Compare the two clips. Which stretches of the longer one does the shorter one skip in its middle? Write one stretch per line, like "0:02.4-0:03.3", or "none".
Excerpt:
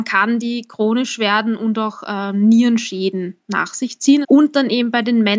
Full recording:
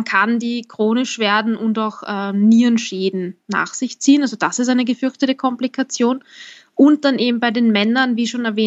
0:04.2-0:06.7

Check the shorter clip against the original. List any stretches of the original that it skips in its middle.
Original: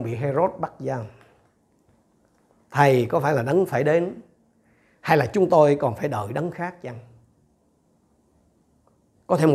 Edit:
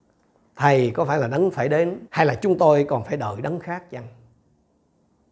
0:04.2-0:05.0

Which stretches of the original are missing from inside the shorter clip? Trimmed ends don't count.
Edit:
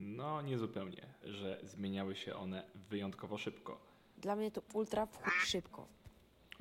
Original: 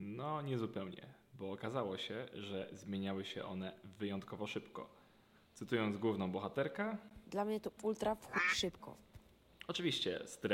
0:01.2-0:02.3
0:05.2-0:07.2

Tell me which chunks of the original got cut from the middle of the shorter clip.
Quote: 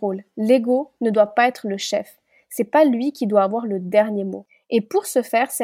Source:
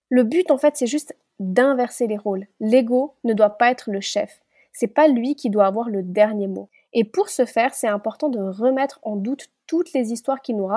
none

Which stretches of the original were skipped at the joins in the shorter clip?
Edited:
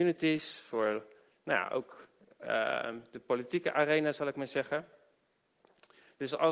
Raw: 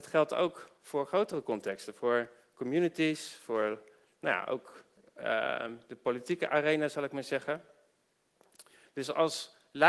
none

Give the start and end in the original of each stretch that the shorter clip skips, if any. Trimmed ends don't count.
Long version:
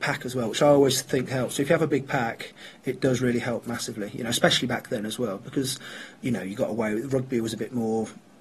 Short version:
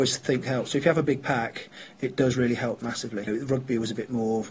0:04.1-0:06.9

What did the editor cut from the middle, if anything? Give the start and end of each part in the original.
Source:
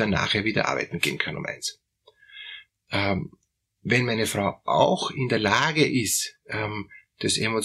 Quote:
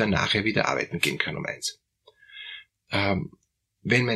none

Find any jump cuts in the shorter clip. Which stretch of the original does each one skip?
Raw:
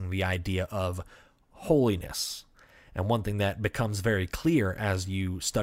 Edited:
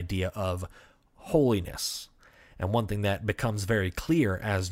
none

